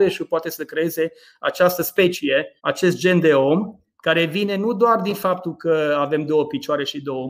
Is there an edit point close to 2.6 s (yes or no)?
yes